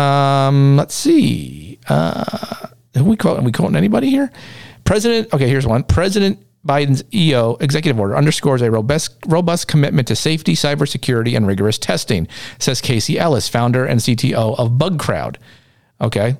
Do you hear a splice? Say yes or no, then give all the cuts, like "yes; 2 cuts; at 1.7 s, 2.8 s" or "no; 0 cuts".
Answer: no; 0 cuts